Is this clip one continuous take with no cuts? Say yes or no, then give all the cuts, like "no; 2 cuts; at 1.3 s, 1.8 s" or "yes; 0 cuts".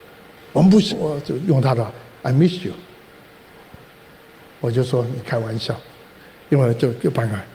no; 1 cut; at 0.9 s